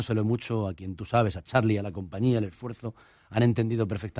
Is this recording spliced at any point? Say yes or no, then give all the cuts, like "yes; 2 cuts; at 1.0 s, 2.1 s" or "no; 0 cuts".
no; 0 cuts